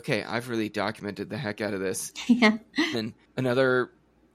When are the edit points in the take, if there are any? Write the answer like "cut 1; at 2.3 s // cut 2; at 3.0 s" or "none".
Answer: cut 1; at 2.9 s